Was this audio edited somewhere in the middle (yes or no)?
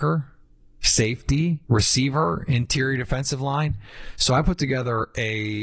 yes